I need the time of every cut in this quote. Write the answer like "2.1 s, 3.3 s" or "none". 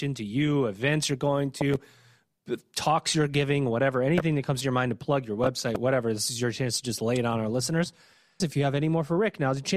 8.4 s